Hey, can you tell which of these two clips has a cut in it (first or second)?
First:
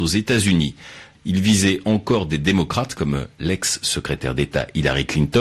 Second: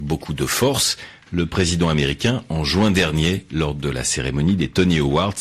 first